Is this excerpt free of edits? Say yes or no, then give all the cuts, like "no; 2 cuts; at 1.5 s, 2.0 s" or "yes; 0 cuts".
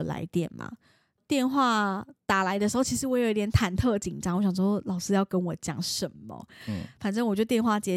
yes; 0 cuts